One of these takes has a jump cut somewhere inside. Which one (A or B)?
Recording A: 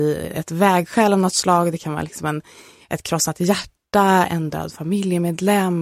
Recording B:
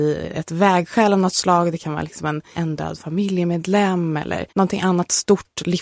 B